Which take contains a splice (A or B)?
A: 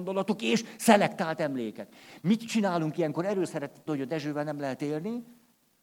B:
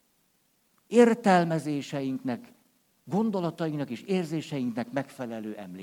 A